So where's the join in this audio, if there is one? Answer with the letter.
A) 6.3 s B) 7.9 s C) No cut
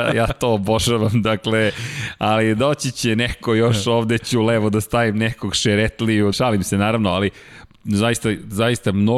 A